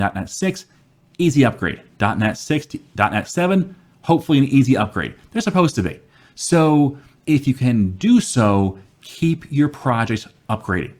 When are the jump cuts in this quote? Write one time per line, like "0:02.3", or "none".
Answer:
none

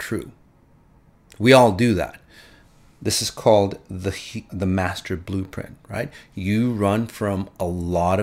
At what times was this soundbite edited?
0:04.5

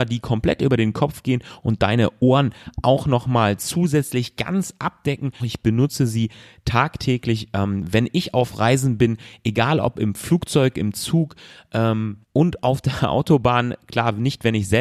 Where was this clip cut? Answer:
0:05.4
0:12.2

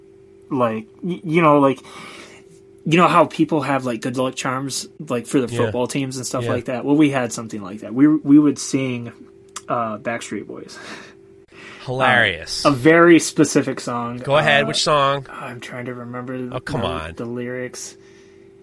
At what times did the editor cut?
none

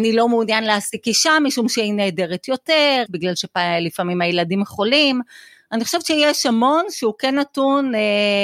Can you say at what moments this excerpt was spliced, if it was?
0:03.1

